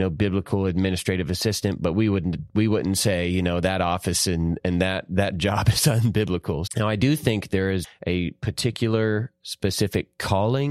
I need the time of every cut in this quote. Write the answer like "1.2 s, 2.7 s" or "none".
6.7 s, 7.8 s